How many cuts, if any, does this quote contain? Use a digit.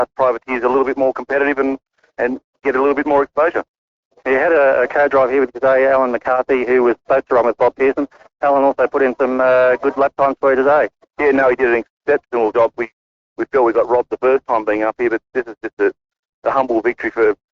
1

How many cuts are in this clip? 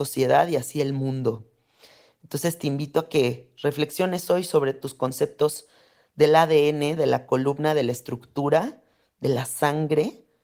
1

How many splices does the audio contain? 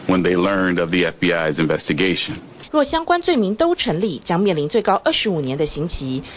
1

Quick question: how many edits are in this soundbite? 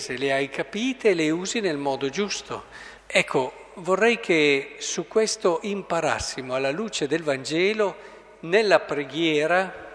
1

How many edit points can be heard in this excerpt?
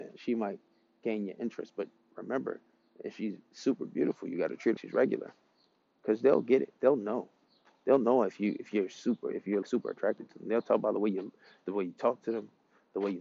2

